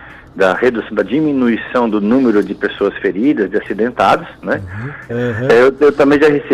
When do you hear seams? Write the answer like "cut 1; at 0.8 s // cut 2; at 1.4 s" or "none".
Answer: cut 1; at 5.1 s